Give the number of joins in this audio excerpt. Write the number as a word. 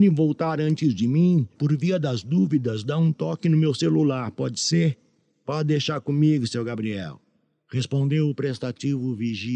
one